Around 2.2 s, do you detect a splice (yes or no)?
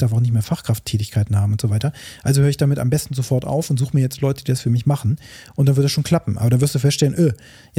no